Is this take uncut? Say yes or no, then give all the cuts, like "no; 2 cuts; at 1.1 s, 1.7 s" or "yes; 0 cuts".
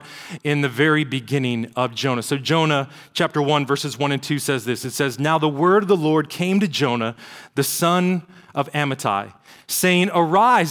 yes; 0 cuts